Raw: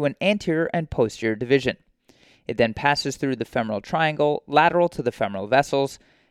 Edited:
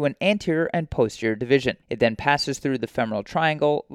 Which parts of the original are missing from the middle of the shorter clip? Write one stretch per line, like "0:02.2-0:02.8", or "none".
0:01.8-0:02.4